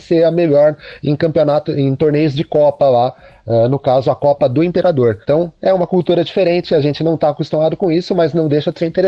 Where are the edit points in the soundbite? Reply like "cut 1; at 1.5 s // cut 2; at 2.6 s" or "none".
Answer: cut 1; at 5.2 s